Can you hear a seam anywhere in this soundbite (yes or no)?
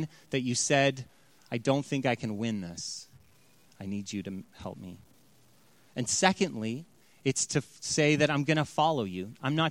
yes